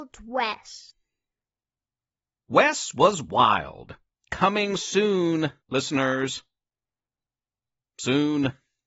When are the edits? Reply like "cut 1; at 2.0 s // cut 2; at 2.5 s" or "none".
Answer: cut 1; at 4.2 s // cut 2; at 5.6 s